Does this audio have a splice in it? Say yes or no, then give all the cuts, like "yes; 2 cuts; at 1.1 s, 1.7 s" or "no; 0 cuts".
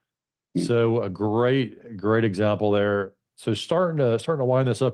no; 0 cuts